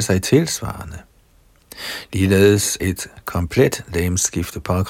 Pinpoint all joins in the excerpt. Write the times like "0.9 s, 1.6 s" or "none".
2.8 s